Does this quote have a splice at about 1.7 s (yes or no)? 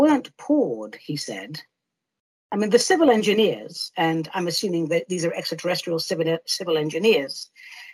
no